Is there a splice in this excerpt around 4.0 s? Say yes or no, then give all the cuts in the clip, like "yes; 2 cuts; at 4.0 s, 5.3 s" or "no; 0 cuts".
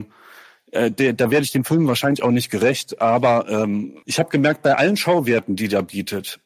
yes; 1 cut; at 4.0 s